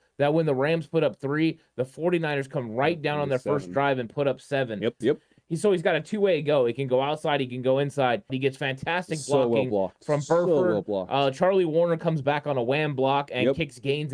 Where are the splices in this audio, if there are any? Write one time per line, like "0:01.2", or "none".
0:05.0
0:08.3